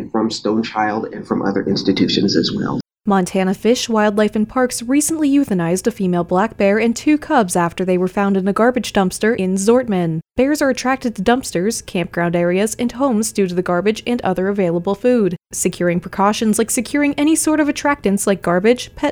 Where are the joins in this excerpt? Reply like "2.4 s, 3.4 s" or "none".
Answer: none